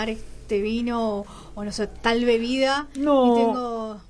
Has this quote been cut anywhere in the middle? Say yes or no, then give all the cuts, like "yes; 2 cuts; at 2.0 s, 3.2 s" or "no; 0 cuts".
no; 0 cuts